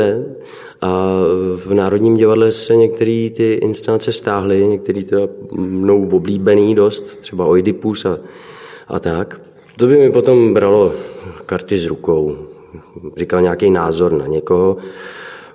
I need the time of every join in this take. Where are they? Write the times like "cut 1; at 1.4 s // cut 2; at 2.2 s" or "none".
cut 1; at 9.8 s // cut 2; at 13.2 s